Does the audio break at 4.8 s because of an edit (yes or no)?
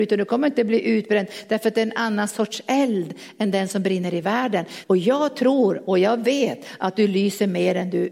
yes